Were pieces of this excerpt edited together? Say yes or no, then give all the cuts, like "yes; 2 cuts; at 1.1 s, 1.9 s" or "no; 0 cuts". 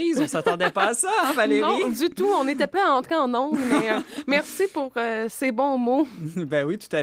no; 0 cuts